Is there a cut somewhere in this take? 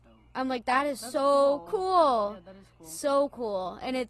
no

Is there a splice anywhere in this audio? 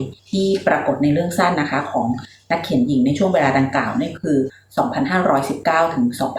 yes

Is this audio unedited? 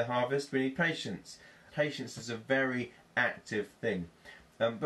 no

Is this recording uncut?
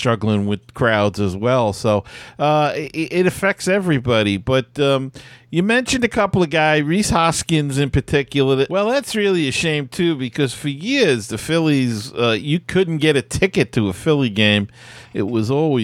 no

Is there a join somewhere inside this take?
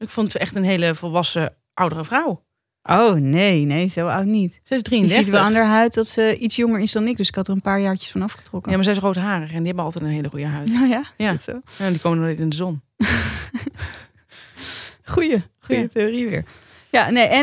no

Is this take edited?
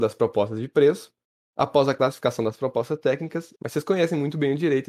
yes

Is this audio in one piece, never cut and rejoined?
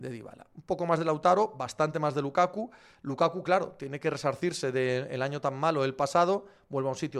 yes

